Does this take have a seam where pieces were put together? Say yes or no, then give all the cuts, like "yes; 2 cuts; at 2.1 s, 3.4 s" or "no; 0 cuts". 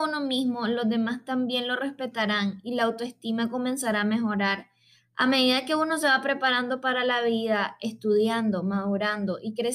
no; 0 cuts